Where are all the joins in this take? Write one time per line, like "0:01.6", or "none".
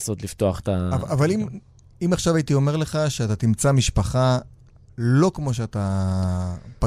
none